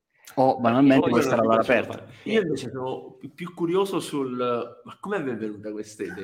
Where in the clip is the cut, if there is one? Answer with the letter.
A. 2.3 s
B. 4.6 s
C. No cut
A